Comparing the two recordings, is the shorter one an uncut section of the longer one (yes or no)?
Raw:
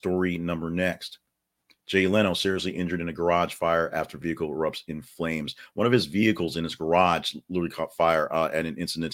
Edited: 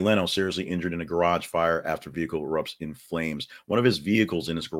yes